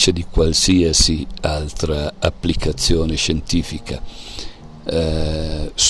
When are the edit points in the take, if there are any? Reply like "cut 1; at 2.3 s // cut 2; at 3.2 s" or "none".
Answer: none